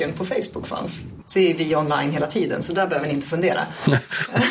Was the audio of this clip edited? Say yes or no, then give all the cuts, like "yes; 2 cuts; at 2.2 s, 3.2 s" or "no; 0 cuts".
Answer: yes; 1 cut; at 1.2 s